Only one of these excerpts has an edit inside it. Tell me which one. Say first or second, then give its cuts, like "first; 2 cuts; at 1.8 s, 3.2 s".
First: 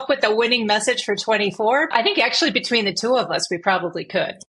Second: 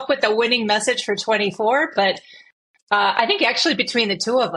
first; 1 cut; at 1.9 s